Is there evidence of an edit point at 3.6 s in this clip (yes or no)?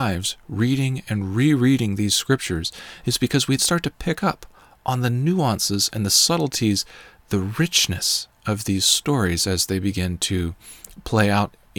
yes